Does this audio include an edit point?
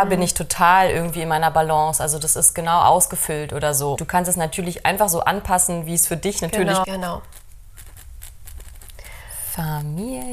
yes; 2 cuts; at 3.9 s, 6.8 s

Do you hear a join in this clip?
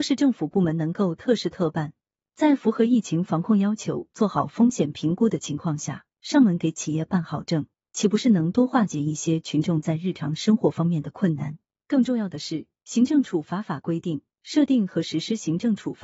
yes; 1 cut; at 7.8 s

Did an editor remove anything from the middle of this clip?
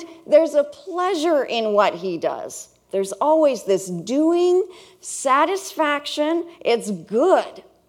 yes; 1 cut; at 2.9 s

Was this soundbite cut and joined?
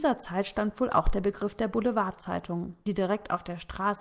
yes; 1 cut; at 2.9 s

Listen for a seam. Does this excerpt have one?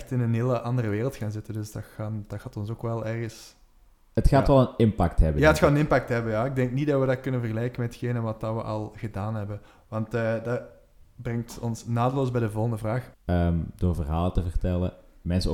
yes; 1 cut; at 13.1 s

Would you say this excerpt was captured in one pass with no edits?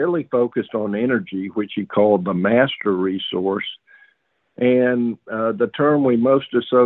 yes; 0 cuts

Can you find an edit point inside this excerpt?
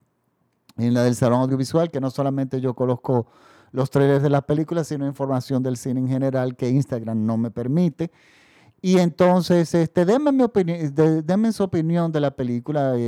no; 0 cuts

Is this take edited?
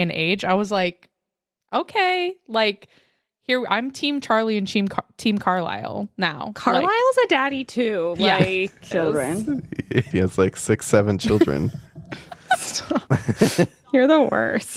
yes; 3 cuts; at 8.9 s, 10.1 s, 13.1 s

